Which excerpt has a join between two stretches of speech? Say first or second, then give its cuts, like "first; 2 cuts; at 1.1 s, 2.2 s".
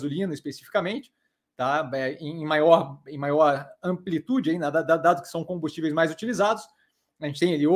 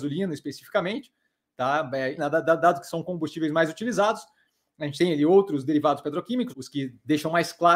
second; 2 cuts; at 2.2 s, 6.5 s